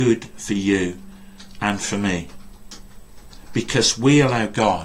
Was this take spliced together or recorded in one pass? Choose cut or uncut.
uncut